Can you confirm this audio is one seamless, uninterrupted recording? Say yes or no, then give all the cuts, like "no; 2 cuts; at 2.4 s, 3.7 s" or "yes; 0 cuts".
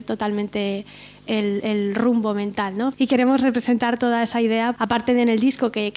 no; 3 cuts; at 1.6 s, 2.9 s, 4.8 s